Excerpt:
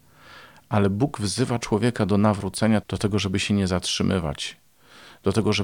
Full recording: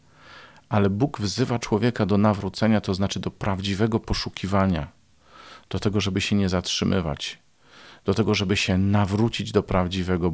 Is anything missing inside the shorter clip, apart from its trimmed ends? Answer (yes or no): yes